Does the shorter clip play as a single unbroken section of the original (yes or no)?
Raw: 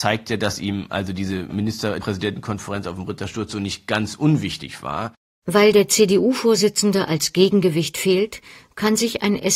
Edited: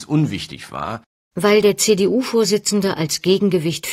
yes